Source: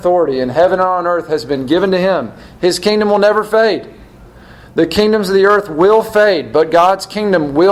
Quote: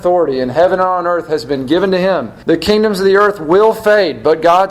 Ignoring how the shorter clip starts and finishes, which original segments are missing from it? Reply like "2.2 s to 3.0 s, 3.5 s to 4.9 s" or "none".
2.4 s to 4.7 s